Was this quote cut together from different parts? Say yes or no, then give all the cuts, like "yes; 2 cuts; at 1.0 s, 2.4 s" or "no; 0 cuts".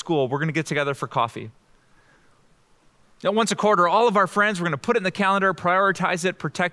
no; 0 cuts